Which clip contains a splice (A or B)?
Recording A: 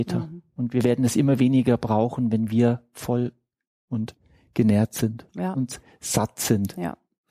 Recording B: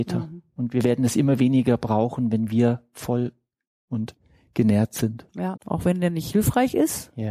B